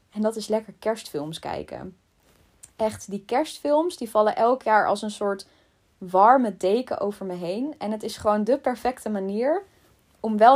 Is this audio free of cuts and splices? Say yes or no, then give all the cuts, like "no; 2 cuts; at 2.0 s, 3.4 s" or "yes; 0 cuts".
yes; 0 cuts